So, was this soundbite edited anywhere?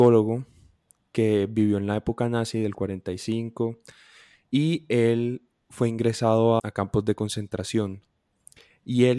yes; 1 cut; at 6.6 s

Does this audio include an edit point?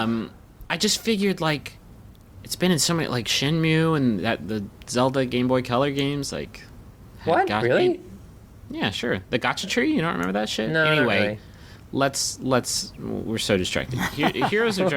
no; 0 cuts

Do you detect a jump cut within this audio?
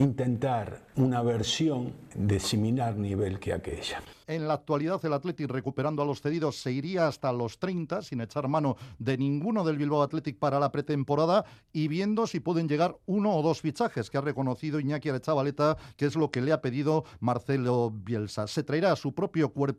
yes; 1 cut; at 4.2 s

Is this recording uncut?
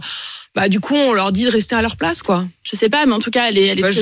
no; 1 cut; at 2.6 s

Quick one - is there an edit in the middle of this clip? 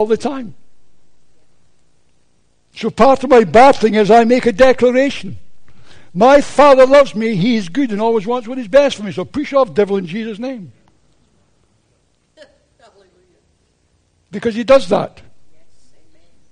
no; 0 cuts

